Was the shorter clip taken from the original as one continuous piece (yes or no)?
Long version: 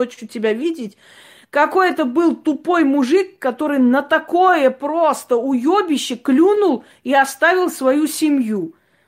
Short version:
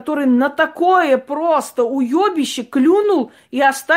yes